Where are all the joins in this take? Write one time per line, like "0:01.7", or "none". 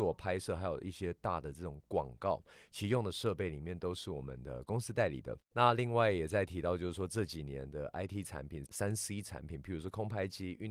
0:05.5
0:08.7